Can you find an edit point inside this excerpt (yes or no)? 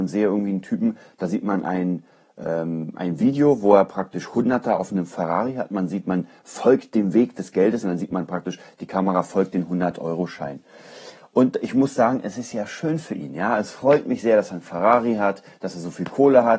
yes